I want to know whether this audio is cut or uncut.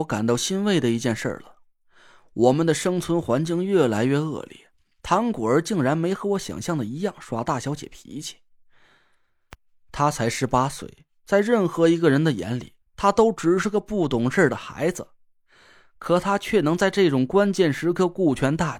uncut